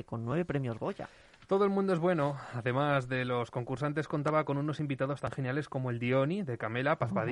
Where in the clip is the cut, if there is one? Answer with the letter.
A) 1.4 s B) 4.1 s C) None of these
C